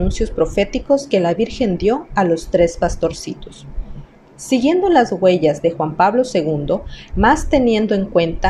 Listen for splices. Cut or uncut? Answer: cut